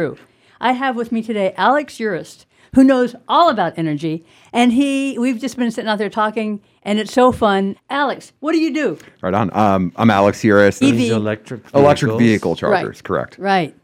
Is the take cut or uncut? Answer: cut